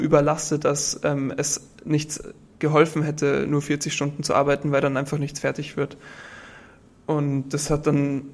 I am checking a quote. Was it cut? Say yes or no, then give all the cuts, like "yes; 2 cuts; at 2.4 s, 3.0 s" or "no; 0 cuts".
no; 0 cuts